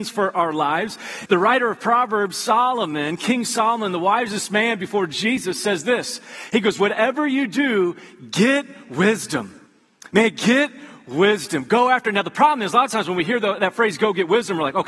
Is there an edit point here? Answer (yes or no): yes